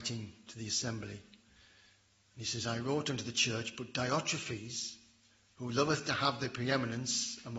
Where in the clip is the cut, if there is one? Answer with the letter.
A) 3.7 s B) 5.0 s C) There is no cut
C